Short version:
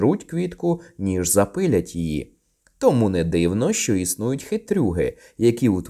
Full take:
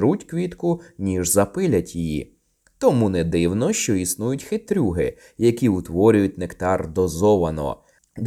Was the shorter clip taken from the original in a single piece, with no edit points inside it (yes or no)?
yes